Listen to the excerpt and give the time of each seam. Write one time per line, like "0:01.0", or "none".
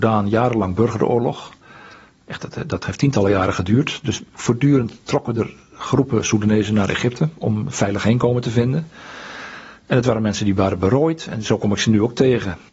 none